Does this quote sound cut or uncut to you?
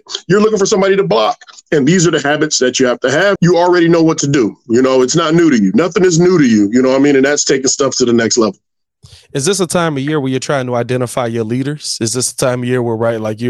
cut